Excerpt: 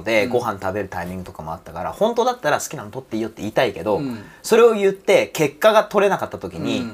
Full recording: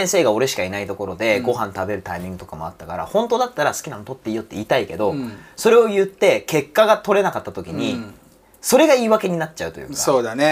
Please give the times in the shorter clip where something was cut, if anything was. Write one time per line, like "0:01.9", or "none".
none